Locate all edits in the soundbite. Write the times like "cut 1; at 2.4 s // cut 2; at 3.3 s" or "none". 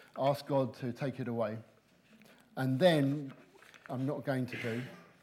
cut 1; at 3.9 s